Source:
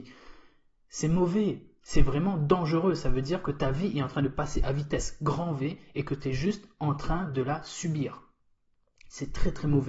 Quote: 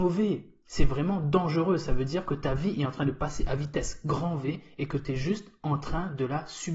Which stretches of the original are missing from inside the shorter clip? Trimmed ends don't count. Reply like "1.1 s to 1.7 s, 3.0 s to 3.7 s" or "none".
none